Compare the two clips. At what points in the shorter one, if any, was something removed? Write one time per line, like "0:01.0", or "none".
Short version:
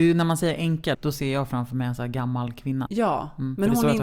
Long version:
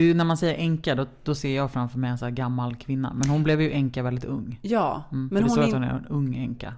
0:00.9
0:02.9